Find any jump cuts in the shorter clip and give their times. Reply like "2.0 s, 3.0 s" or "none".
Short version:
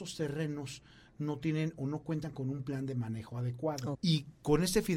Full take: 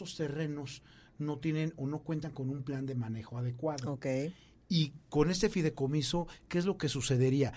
3.9 s